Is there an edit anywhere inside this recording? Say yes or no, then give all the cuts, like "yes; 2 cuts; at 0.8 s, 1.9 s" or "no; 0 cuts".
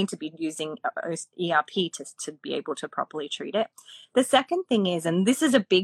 no; 0 cuts